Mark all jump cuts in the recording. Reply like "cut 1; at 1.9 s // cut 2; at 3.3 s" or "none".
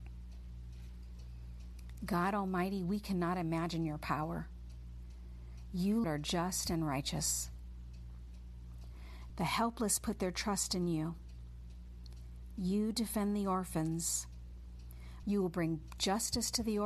cut 1; at 6.0 s // cut 2; at 9.3 s // cut 3; at 15.2 s

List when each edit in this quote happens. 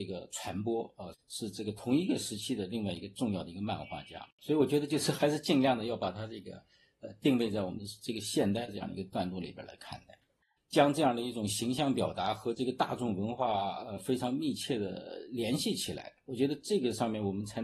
cut 1; at 1.1 s // cut 2; at 10.6 s

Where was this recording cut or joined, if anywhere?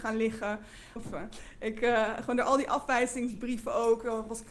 cut 1; at 1.0 s

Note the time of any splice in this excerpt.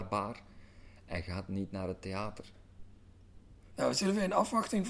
cut 1; at 3.7 s

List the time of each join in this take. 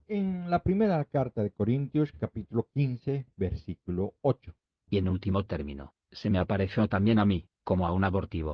none

